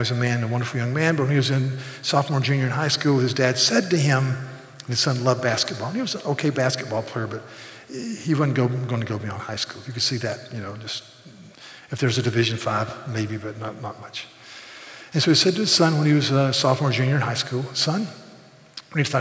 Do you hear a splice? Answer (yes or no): no